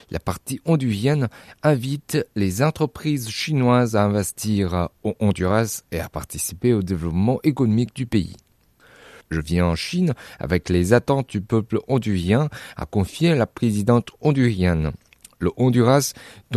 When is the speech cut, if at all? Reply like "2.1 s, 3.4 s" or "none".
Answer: 9.2 s